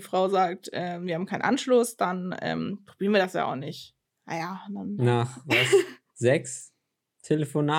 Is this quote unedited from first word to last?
no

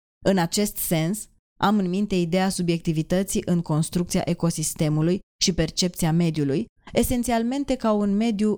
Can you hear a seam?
yes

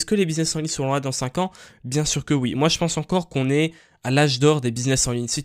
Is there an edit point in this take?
no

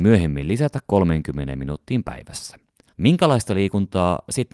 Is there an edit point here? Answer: yes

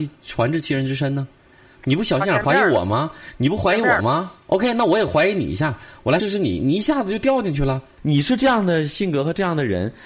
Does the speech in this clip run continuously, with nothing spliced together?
no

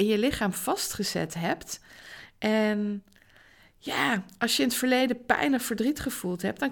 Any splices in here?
no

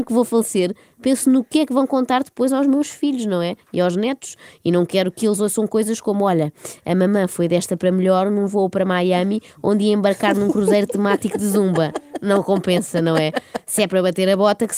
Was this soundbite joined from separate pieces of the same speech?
no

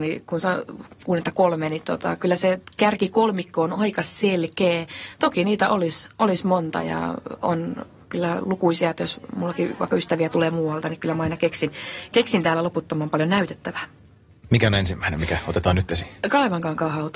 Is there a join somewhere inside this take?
no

